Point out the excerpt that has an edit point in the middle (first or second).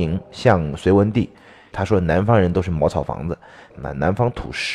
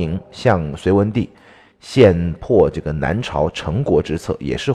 first